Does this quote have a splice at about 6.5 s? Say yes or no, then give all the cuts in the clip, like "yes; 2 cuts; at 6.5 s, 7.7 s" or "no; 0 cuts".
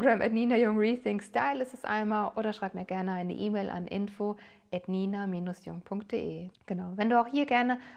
yes; 1 cut; at 6.5 s